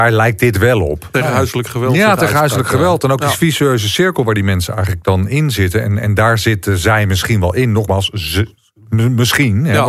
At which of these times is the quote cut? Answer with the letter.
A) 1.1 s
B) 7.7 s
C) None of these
A